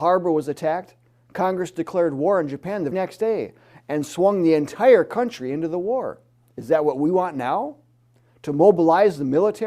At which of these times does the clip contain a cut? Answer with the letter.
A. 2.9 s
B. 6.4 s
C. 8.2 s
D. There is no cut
A